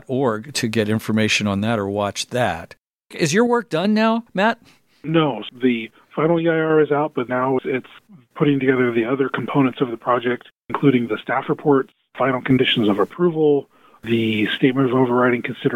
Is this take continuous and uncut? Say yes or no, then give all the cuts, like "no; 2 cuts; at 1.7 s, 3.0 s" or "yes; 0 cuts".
no; 1 cut; at 7.3 s